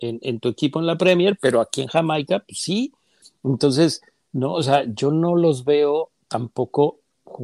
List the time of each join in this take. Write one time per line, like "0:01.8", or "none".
none